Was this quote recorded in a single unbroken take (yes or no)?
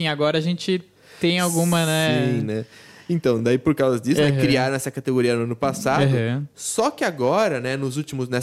yes